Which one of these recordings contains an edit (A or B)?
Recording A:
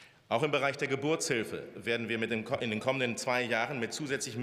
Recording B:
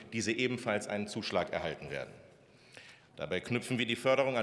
B